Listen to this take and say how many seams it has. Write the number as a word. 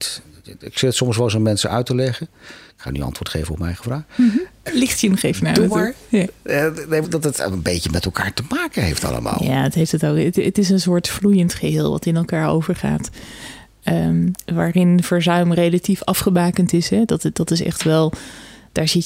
two